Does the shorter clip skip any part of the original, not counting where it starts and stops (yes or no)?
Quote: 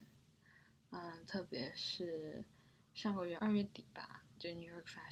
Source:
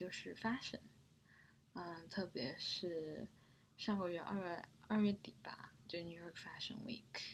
yes